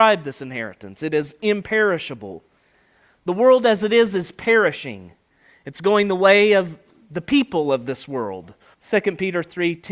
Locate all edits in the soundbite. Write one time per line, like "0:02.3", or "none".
0:08.7